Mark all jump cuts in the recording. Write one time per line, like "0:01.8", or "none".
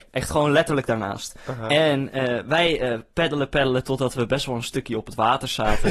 0:03.5